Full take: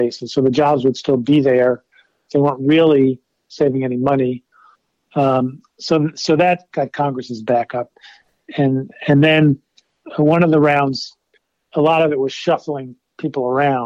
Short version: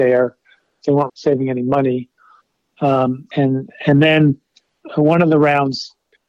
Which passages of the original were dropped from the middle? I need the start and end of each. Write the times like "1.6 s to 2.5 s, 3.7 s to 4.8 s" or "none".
2.6 s to 3.4 s, 5.7 s to 8.5 s